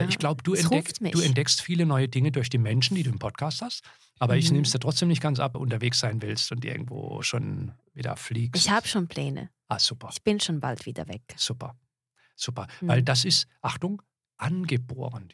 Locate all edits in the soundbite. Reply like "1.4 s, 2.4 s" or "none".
5.5 s